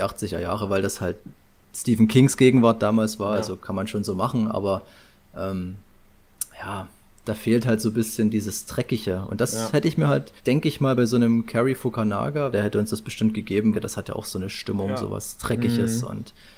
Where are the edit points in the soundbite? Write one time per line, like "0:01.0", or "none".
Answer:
0:10.4
0:12.5
0:13.7